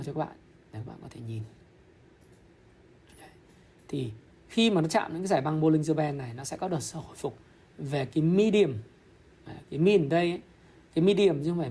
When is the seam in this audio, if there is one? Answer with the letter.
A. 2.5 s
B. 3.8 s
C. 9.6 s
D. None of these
C